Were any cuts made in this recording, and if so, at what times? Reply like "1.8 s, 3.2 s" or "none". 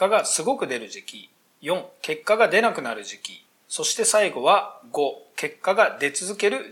none